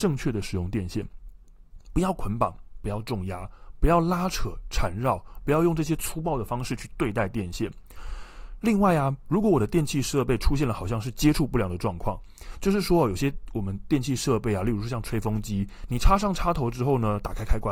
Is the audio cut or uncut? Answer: uncut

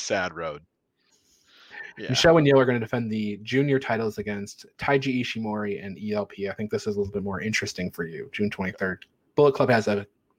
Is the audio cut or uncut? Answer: uncut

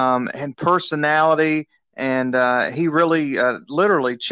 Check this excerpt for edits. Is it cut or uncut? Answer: uncut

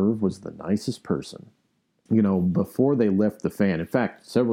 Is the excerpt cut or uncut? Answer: cut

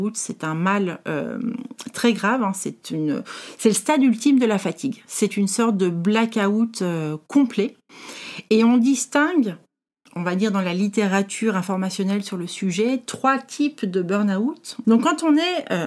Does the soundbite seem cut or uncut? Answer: cut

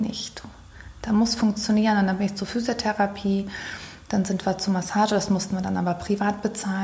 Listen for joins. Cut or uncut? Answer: uncut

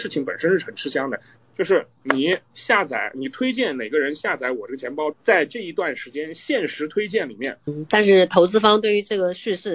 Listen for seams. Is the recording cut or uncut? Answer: cut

